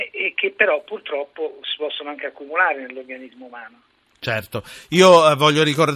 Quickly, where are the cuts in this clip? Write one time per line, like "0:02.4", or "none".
none